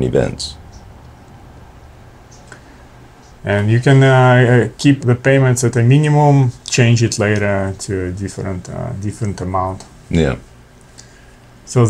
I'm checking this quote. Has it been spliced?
yes; 3 cuts; at 3.4 s, 5.0 s, 6.6 s

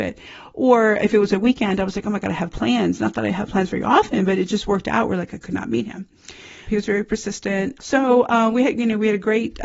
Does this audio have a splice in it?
yes; 2 cuts; at 6.6 s, 7.8 s

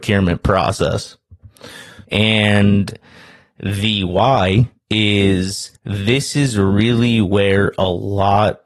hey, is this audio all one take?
no; 2 cuts; at 2.0 s, 5.8 s

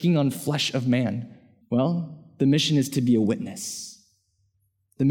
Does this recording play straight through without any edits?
no; 1 cut; at 1.6 s

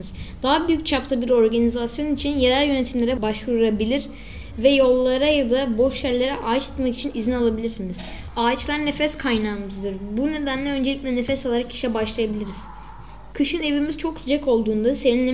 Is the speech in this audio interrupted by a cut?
yes; 1 cut; at 13.3 s

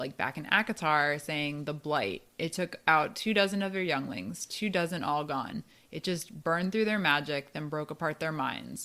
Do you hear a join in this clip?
no; 0 cuts

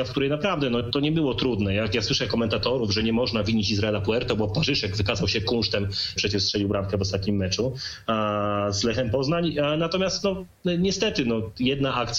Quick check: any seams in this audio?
yes; 1 cut; at 6.2 s

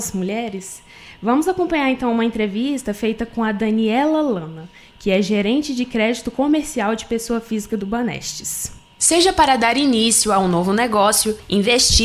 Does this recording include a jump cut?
no; 0 cuts

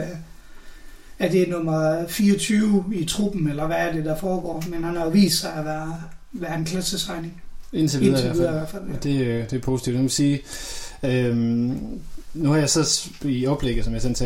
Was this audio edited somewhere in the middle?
no; 0 cuts

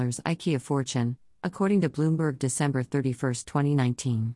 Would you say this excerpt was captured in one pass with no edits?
yes; 0 cuts

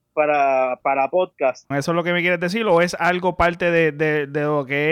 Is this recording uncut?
no; 1 cut; at 1.7 s

